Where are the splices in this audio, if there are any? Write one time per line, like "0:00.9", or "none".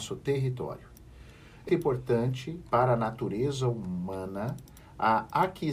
0:01.7